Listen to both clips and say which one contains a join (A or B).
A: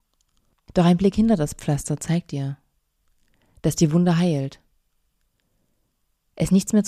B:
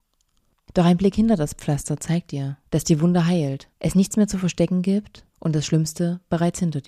B